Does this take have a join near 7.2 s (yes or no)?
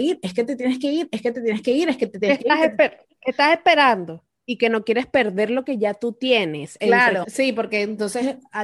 yes